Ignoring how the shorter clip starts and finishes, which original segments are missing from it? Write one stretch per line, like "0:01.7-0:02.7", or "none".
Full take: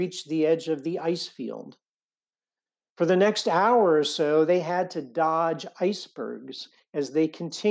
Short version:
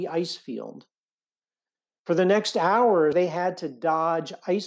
0:04.0-0:04.5